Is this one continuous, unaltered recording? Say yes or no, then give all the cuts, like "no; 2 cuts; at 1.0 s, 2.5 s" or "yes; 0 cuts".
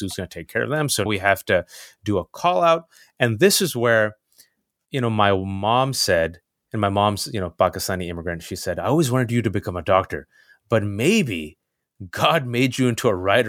no; 1 cut; at 1.1 s